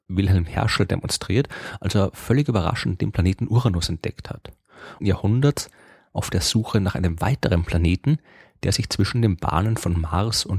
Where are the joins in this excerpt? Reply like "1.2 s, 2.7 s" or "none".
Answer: 5.0 s